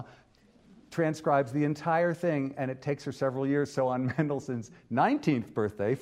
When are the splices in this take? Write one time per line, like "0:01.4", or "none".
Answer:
none